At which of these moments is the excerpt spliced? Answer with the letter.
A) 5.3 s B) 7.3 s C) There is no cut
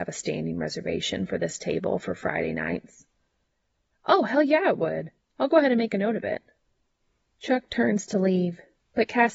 A